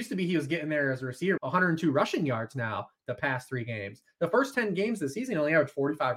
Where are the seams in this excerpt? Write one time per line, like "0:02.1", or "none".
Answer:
0:01.4